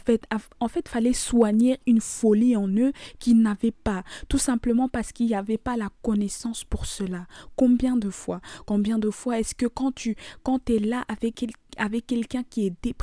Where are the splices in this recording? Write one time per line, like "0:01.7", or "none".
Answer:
none